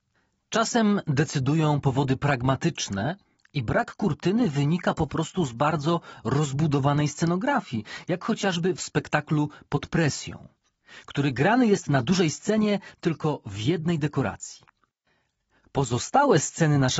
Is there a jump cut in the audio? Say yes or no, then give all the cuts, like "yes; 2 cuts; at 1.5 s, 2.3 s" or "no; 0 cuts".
no; 0 cuts